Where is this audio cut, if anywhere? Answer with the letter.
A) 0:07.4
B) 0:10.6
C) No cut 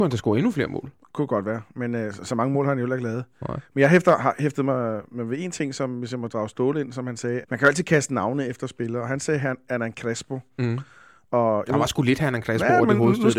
A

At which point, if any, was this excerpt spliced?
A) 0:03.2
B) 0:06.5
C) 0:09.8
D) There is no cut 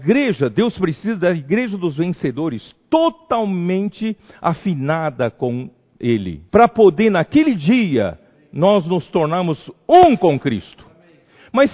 B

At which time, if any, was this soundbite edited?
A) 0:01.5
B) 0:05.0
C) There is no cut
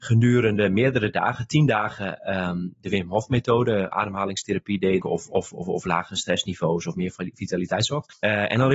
B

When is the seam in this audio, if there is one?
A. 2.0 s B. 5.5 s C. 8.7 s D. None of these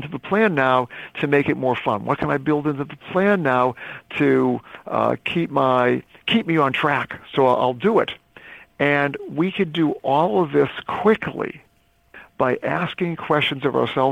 D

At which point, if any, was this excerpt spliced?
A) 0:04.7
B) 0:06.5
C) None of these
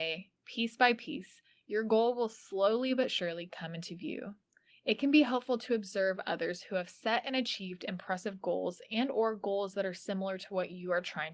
A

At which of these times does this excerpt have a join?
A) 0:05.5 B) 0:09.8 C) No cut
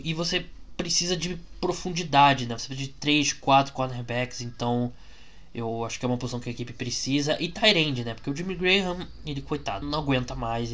B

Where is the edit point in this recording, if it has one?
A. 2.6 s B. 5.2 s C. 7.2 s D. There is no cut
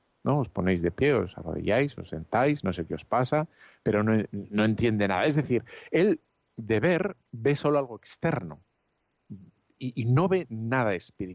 C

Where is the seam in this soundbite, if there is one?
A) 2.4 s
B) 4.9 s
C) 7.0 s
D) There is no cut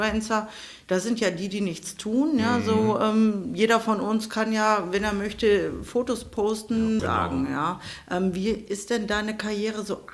C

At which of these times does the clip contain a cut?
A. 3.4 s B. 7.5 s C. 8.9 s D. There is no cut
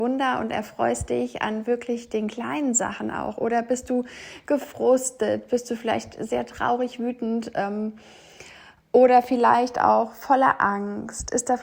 D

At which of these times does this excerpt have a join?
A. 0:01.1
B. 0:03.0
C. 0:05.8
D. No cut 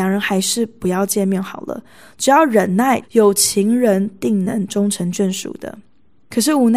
B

